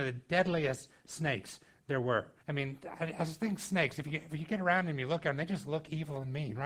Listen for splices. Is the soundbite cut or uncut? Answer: cut